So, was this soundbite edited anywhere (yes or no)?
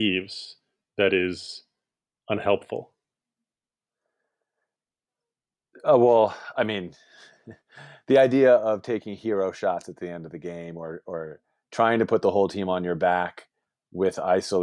no